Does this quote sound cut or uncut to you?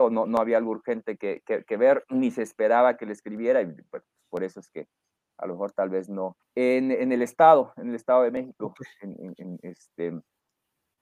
cut